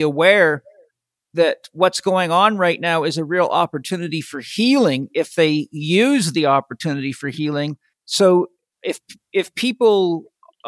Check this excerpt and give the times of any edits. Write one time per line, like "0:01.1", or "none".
0:07.9